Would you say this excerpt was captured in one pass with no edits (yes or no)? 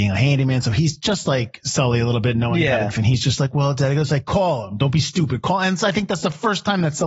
no